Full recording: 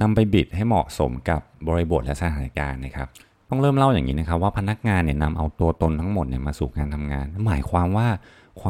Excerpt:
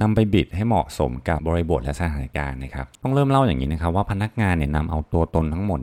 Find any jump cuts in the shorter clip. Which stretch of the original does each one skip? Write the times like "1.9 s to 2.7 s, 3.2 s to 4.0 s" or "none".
1.4 s to 1.6 s, 3.2 s to 3.4 s